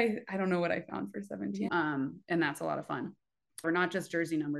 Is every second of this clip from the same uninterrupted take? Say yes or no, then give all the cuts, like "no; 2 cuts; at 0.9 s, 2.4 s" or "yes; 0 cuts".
no; 2 cuts; at 1.7 s, 3.6 s